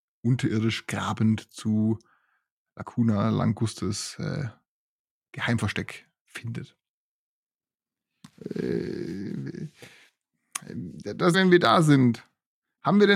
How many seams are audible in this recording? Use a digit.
2